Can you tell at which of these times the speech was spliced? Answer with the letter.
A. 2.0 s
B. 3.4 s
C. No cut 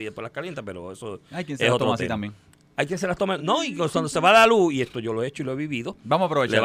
C